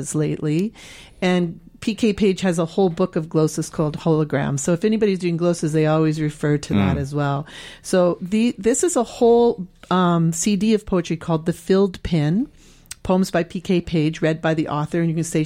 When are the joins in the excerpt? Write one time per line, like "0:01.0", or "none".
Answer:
none